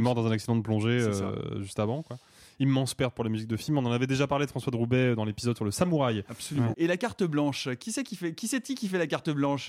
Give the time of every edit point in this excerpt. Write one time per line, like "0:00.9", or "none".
0:06.7